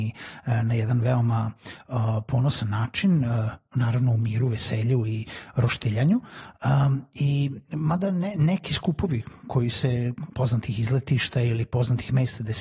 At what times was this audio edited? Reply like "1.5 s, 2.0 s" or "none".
10.3 s